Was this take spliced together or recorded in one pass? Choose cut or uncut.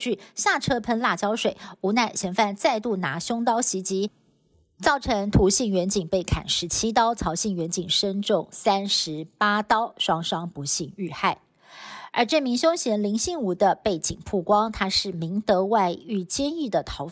uncut